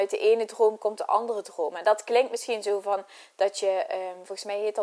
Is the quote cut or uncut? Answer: uncut